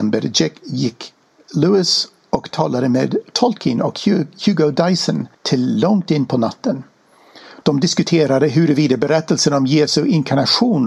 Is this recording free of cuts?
no; 1 cut; at 5.3 s

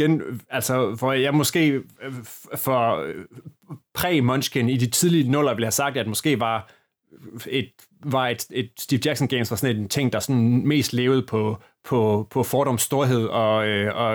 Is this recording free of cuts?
yes; 0 cuts

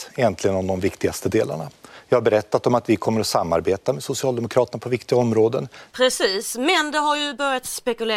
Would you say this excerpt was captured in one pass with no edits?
no; 1 cut; at 5.9 s

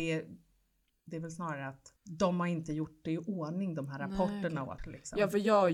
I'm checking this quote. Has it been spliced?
yes; 2 cuts; at 2.0 s, 4.8 s

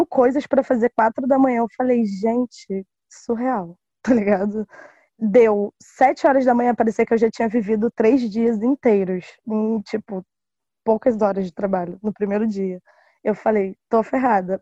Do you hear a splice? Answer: no; 0 cuts

